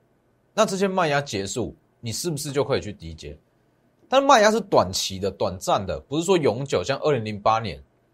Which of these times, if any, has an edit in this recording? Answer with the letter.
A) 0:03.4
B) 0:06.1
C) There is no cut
C